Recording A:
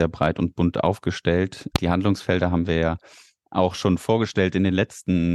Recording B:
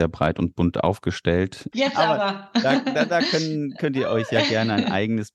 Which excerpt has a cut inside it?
B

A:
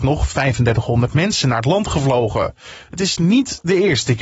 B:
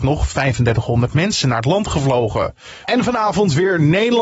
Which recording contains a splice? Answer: B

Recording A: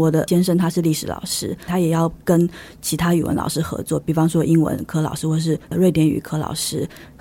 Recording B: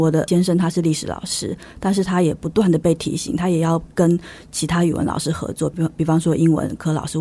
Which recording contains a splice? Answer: A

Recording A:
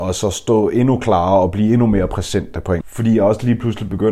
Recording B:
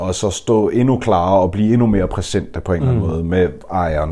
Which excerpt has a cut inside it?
A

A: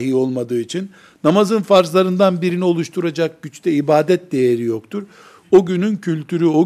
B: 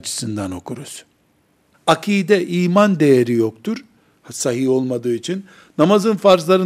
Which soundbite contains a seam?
B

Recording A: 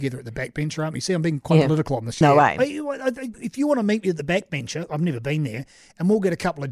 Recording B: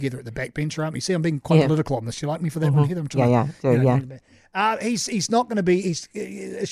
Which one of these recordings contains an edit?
A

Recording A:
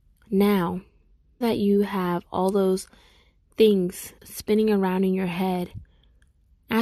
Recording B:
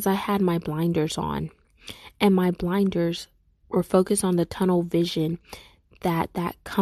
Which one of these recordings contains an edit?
A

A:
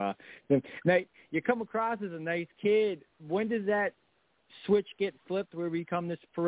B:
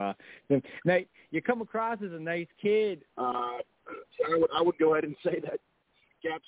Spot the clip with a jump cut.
B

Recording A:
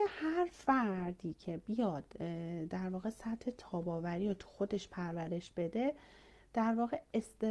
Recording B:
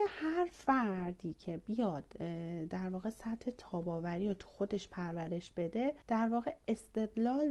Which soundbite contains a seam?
B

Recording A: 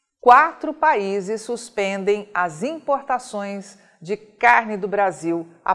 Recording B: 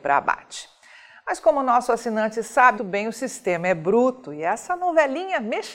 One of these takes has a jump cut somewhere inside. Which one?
B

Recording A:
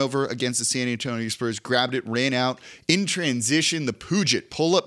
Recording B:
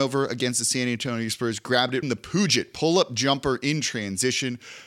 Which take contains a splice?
B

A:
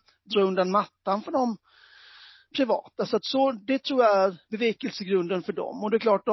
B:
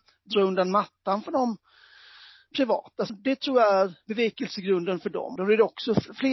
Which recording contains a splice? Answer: B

